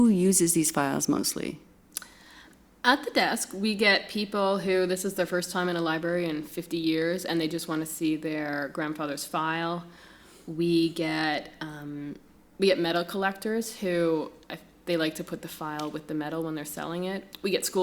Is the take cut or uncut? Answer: uncut